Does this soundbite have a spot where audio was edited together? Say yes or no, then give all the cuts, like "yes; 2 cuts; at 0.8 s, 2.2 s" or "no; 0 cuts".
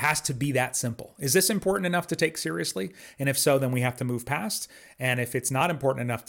no; 0 cuts